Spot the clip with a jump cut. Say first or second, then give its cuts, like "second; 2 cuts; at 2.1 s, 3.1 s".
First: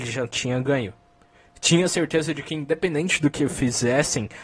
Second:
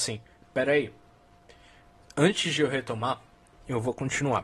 second; 1 cut; at 2.0 s